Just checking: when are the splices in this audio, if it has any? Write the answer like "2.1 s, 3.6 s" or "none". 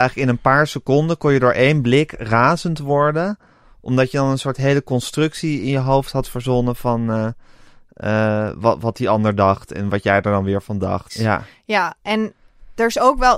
11.1 s

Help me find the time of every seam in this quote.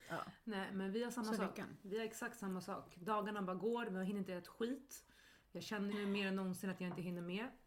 5.9 s

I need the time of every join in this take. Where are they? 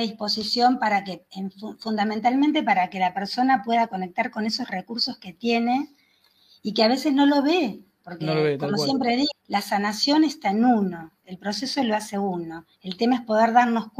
9.3 s

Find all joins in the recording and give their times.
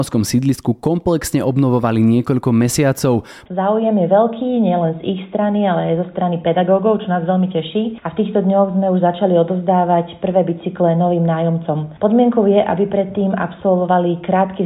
3.4 s

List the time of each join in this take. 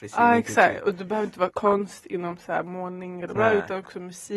1.5 s, 3.4 s

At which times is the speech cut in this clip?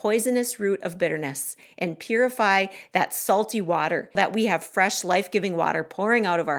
4.1 s

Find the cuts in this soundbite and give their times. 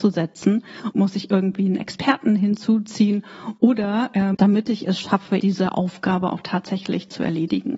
0.9 s, 4.3 s, 5.4 s

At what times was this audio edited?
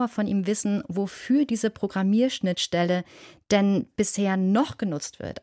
none

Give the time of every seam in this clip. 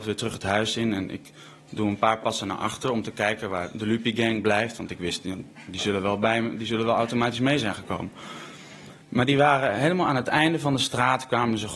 9.0 s

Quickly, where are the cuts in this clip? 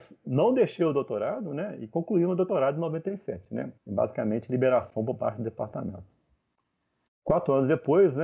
3.8 s, 7.1 s

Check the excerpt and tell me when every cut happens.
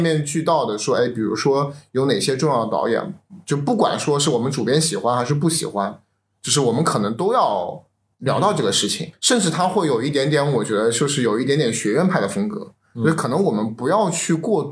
none

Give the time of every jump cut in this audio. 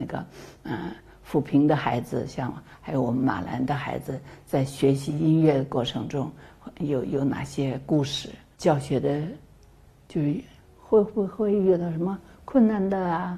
none

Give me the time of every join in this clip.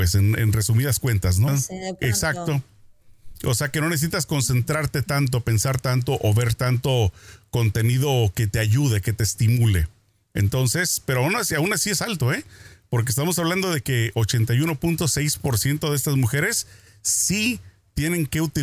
1.5 s

